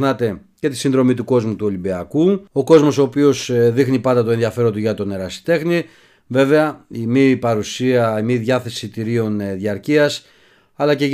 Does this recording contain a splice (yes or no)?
no